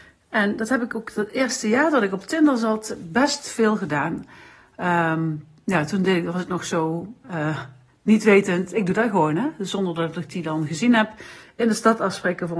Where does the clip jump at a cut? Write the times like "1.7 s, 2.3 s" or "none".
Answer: 7.2 s

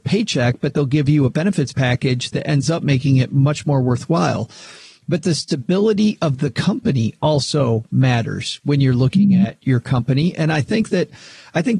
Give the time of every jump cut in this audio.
none

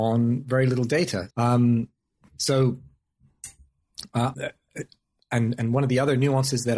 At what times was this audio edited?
1.3 s, 4.3 s

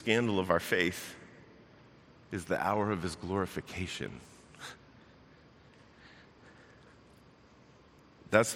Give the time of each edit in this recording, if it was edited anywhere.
none

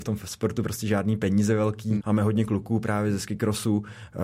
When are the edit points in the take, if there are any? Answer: 2.0 s

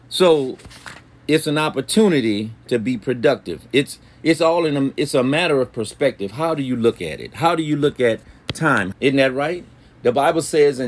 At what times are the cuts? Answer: 8.9 s

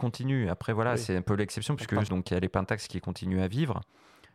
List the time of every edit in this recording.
2.1 s

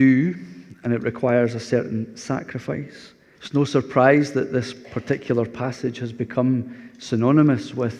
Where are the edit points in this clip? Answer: 3.3 s

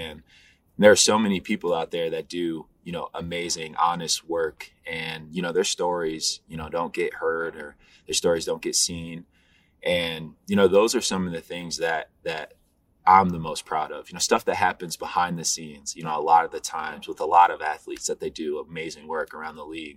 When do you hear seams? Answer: none

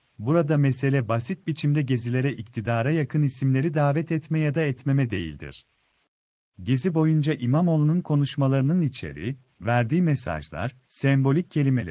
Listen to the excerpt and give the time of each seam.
6.5 s

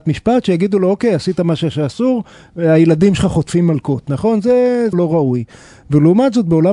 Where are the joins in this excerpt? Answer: 4.9 s

